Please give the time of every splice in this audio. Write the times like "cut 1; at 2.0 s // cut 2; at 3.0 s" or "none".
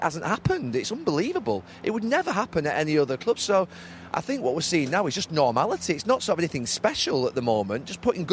none